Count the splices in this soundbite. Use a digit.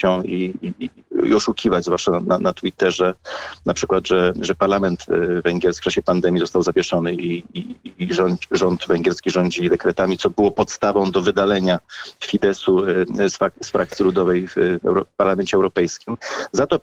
1